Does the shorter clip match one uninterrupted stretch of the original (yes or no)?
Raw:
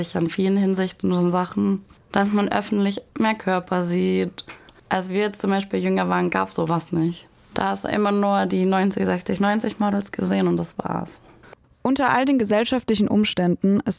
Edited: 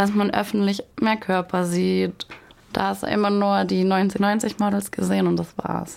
no